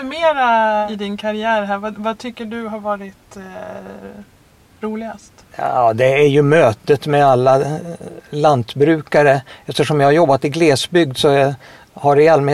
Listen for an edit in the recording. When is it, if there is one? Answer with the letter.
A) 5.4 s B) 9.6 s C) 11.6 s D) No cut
A